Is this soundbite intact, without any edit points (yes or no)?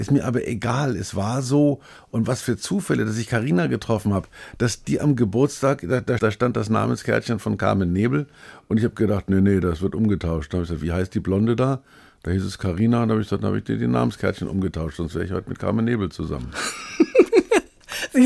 no